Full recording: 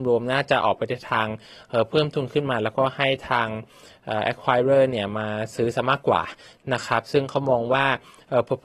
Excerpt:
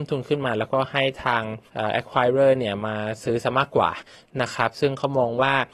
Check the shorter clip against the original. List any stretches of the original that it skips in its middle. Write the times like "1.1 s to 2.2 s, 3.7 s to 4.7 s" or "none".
3.7 s to 4.0 s